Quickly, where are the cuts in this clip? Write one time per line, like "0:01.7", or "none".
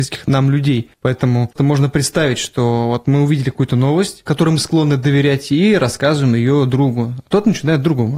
0:01.6